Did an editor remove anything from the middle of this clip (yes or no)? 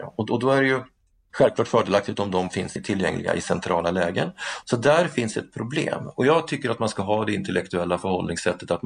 yes